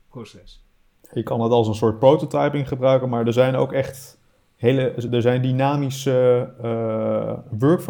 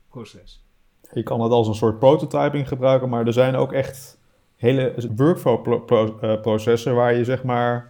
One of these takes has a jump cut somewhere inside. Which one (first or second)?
second